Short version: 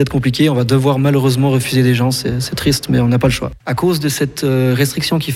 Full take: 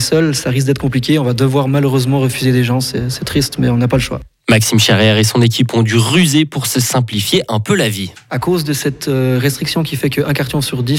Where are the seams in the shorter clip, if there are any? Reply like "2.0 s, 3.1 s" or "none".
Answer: 3.6 s